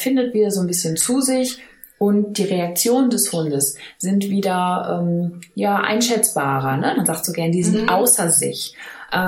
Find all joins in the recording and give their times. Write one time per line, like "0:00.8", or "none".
0:06.9